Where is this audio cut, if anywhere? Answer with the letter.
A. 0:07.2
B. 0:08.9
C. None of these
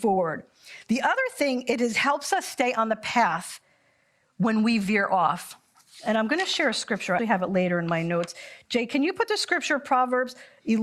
A